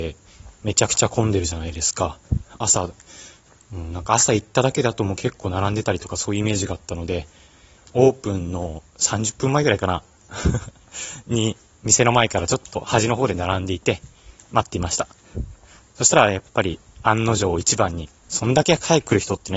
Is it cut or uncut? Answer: cut